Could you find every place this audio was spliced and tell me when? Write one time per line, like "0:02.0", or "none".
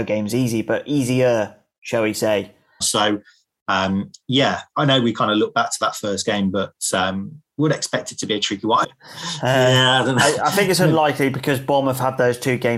0:02.8
0:08.8